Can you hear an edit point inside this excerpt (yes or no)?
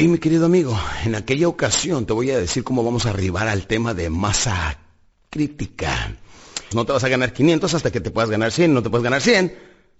yes